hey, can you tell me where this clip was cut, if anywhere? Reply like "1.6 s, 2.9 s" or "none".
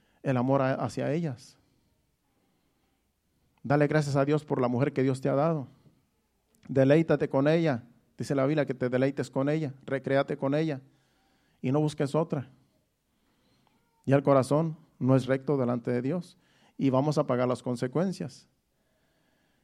14.0 s